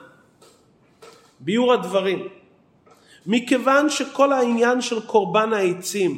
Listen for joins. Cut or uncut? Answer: uncut